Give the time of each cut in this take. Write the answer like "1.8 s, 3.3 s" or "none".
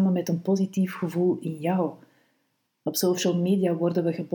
2.7 s